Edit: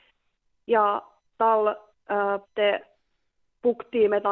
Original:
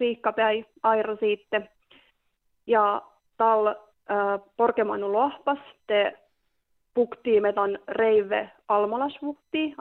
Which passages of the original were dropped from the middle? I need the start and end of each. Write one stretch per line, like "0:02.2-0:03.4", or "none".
0:04.4-0:05.8